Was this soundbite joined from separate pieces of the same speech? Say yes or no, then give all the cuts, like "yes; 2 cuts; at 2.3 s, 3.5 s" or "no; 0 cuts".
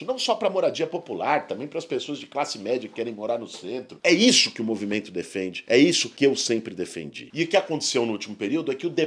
no; 0 cuts